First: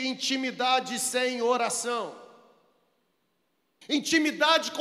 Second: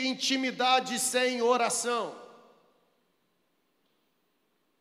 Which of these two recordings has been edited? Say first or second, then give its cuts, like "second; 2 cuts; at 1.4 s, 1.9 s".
first; 1 cut; at 3.8 s